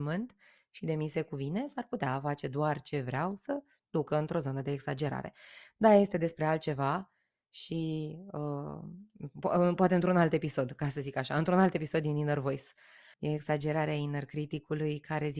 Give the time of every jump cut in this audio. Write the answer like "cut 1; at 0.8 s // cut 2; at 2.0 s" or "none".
cut 1; at 13.1 s